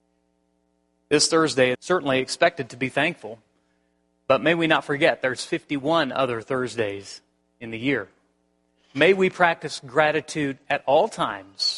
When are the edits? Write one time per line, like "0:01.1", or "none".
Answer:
0:01.7